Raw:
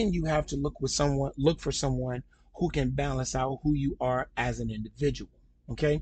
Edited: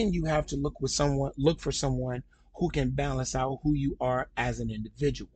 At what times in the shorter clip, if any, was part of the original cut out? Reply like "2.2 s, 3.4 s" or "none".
none